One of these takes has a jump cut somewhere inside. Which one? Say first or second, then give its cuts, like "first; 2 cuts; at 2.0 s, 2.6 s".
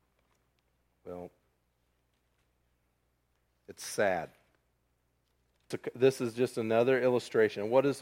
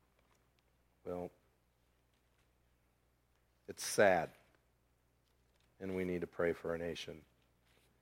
first; 1 cut; at 5.7 s